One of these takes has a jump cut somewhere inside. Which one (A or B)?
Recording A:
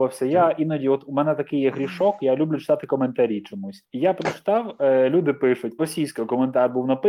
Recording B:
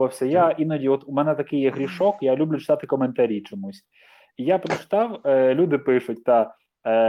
A